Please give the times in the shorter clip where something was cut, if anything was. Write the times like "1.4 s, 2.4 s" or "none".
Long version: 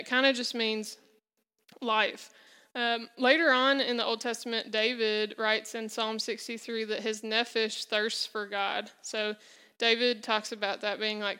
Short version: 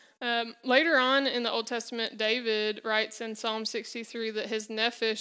none